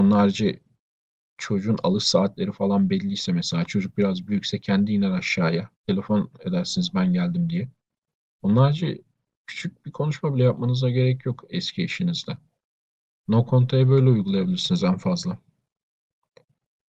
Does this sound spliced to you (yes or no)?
no